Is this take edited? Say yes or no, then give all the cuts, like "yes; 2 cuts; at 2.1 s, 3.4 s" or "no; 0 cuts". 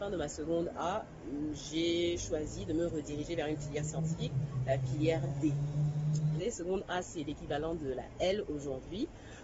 yes; 1 cut; at 6.4 s